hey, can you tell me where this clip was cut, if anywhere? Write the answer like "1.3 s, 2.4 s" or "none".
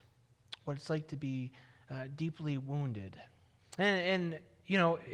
3.6 s